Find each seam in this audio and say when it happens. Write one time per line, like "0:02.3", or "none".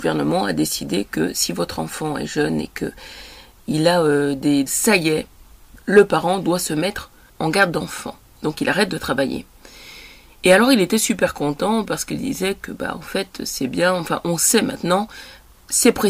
0:04.7